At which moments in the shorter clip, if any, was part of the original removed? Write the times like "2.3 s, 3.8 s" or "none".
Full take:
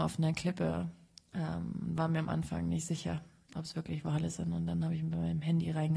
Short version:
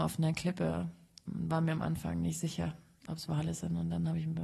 1.3 s, 3.3 s

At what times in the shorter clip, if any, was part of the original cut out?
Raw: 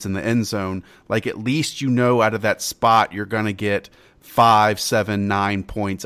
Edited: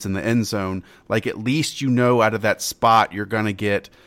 none

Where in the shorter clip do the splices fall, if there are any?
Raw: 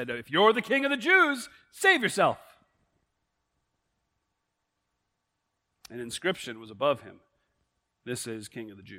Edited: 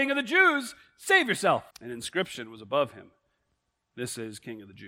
1.7 s

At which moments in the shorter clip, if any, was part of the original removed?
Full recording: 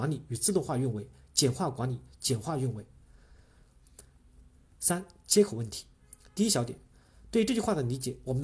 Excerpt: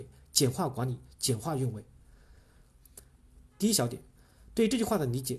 3.5 s

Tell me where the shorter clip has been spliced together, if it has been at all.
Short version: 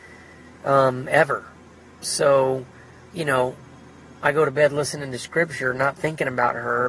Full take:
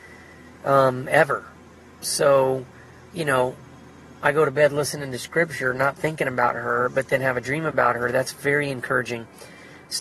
none

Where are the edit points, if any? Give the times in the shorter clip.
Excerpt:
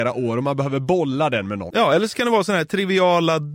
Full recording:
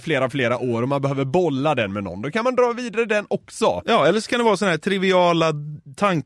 1.7 s

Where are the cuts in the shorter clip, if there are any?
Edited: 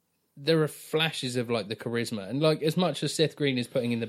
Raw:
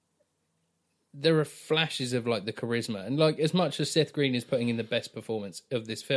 none

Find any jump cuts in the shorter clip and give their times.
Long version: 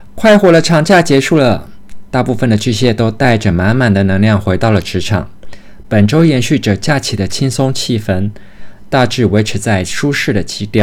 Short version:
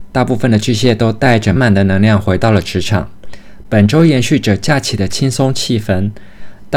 1.6 s

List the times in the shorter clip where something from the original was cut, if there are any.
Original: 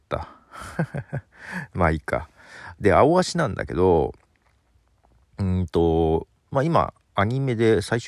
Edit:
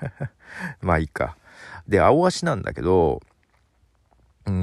none

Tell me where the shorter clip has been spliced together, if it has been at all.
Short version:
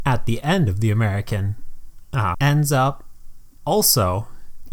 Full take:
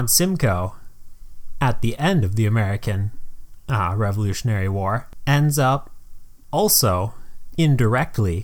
2.3 s

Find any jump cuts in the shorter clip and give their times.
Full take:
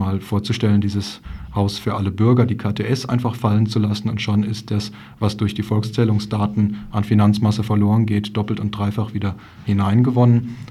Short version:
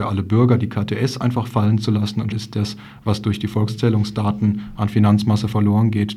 2.3 s

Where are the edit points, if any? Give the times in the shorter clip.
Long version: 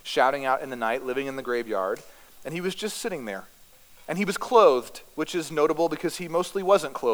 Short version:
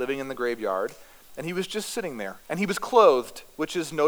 2.4 s

